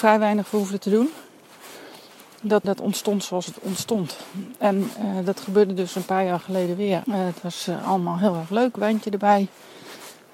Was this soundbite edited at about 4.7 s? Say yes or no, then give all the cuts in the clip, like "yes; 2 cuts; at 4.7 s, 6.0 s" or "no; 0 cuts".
no; 2 cuts; at 2.6 s, 7.0 s